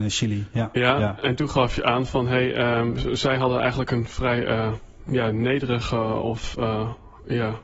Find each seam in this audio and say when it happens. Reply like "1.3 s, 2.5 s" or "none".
none